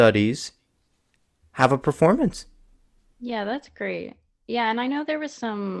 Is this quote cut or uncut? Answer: uncut